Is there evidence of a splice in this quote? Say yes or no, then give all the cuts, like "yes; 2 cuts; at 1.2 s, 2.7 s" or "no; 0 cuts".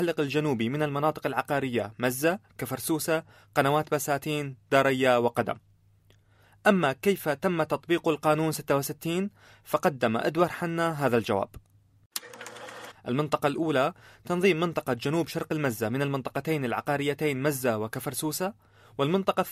yes; 1 cut; at 12.9 s